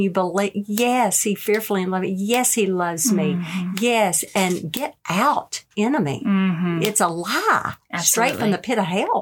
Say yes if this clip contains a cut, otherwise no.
no